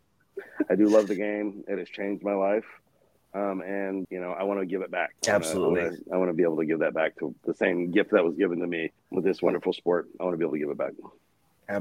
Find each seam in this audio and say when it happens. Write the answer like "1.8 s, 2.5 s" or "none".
4.0 s, 5.2 s, 9.0 s